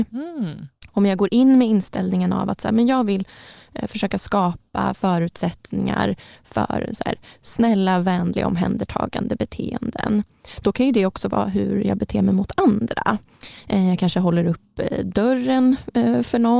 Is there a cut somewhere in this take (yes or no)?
no